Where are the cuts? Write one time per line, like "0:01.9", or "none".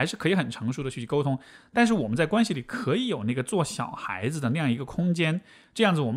none